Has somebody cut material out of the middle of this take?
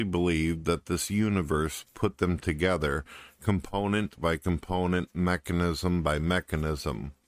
no; 0 cuts

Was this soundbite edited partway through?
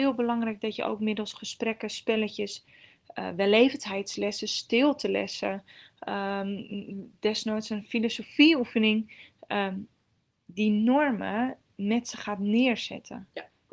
no; 0 cuts

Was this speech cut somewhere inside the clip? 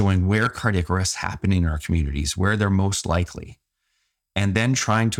no; 0 cuts

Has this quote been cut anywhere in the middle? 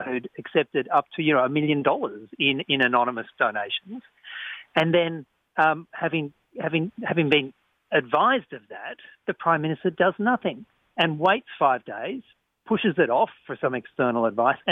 no; 0 cuts

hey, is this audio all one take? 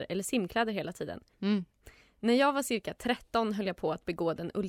no; 1 cut; at 1.3 s

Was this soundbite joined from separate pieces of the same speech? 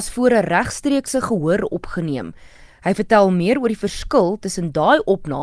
no; 0 cuts

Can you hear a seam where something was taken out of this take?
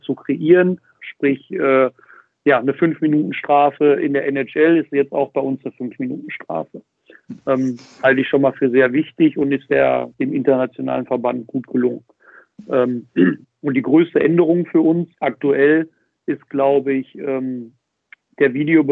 yes; 2 cuts; at 1.0 s, 15.1 s

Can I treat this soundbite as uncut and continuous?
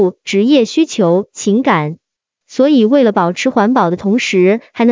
yes; 0 cuts

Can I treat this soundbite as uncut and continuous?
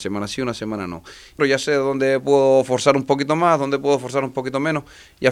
no; 1 cut; at 1.4 s

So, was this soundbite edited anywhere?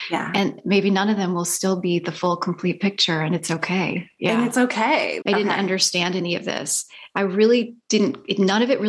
yes; 1 cut; at 5.2 s

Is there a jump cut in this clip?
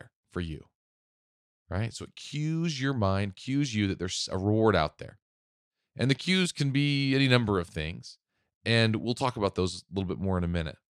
no; 0 cuts

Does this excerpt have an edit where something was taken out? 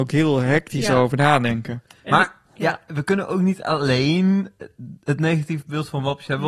no; 0 cuts

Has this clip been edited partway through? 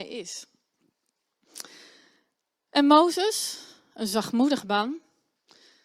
no; 0 cuts

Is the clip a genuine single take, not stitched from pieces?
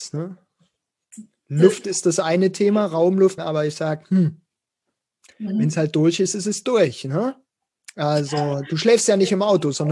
no; 1 cut; at 3.4 s

